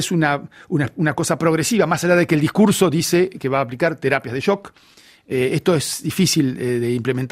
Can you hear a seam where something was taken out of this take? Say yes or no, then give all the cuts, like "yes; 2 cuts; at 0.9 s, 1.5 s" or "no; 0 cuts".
no; 0 cuts